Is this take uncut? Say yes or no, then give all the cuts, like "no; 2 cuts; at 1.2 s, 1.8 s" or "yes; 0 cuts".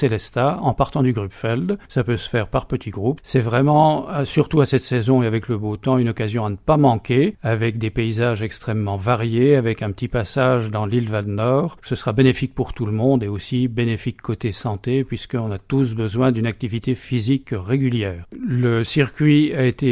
yes; 0 cuts